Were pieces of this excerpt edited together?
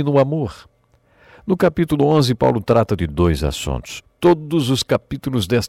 yes; 1 cut; at 4.0 s

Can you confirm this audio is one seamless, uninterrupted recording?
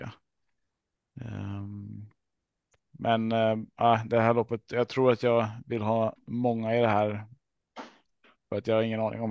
yes; 0 cuts

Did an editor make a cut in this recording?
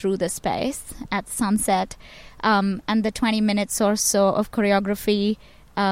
no; 0 cuts

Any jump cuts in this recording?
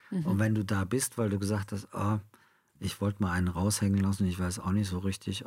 no; 0 cuts

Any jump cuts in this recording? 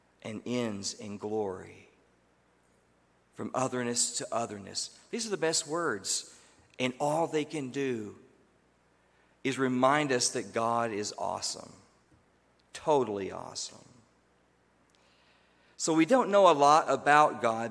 no; 0 cuts

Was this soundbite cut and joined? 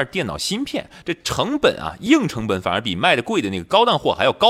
no; 0 cuts

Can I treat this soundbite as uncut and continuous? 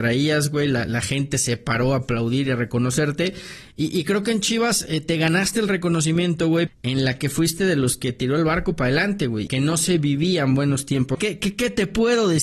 no; 3 cuts; at 6.7 s, 9.5 s, 11.1 s

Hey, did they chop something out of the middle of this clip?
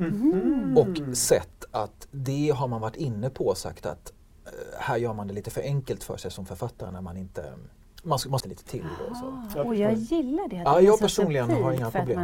yes; 1 cut; at 8.4 s

